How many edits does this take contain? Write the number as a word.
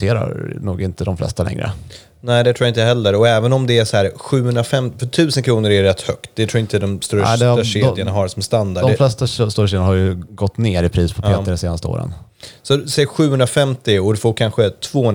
zero